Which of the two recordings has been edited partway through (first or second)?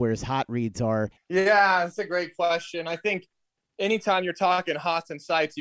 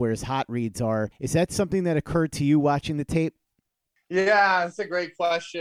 first